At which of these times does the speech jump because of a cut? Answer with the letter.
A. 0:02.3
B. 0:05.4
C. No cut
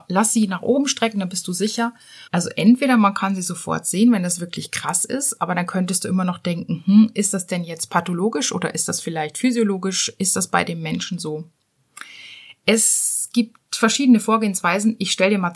A